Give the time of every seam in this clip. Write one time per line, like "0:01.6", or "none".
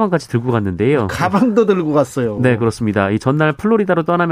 none